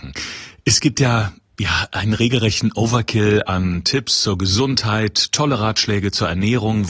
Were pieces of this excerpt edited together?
no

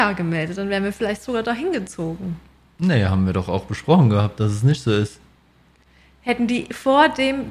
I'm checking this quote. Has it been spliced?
no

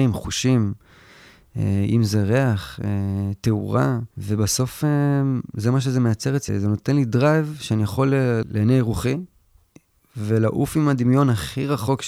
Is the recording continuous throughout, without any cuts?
no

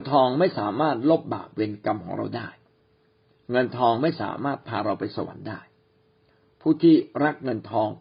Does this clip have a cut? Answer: no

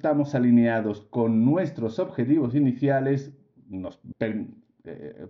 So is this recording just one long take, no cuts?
no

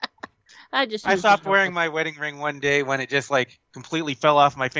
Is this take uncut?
yes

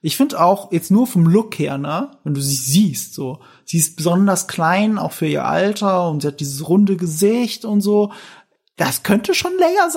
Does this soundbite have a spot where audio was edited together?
no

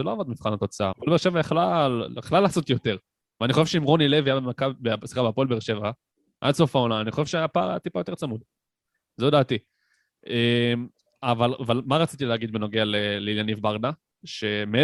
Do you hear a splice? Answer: yes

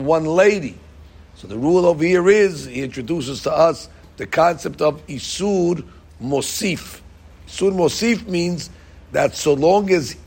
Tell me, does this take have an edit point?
no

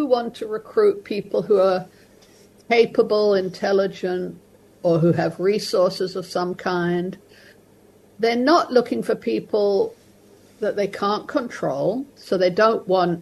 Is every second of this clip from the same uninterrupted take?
yes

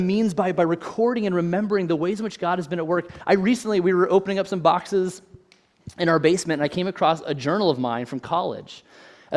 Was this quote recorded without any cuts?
yes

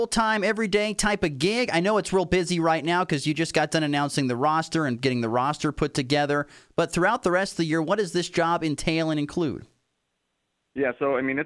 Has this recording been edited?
no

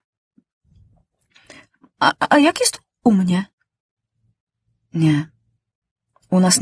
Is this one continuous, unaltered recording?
yes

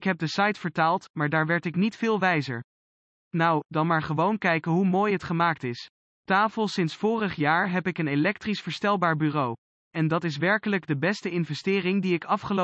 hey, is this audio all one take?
yes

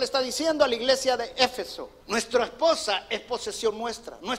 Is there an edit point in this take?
yes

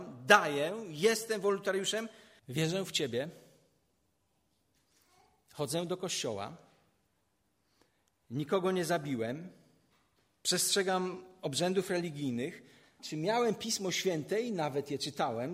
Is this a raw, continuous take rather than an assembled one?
no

